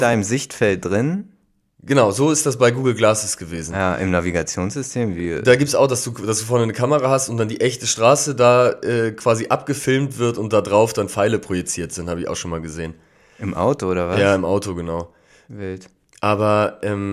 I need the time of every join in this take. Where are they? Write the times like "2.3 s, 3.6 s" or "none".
none

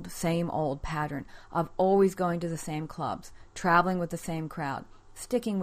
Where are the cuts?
none

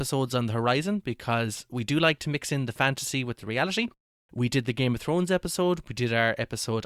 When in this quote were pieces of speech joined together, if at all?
none

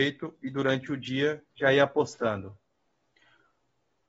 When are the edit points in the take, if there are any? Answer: 1.5 s

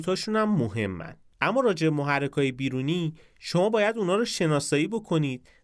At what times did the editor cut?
1.3 s

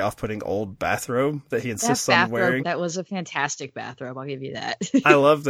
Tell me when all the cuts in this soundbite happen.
2.6 s

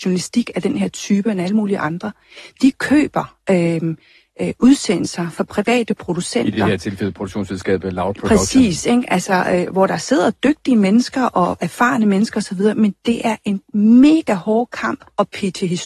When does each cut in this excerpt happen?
none

